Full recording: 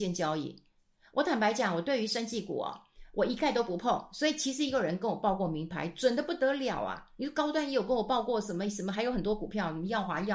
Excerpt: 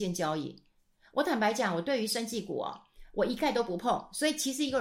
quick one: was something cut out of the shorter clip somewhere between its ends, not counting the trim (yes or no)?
no